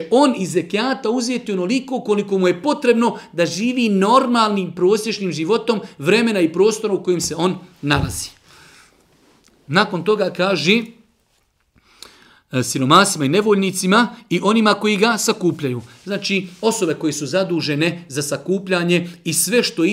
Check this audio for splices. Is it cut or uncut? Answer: uncut